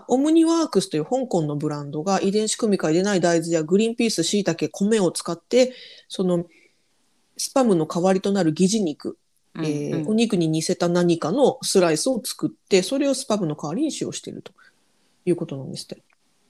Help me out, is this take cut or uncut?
uncut